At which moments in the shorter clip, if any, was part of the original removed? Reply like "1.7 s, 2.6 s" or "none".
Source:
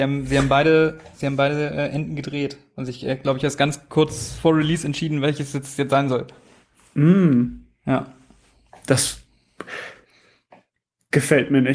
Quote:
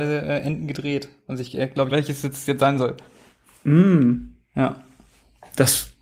1.9 s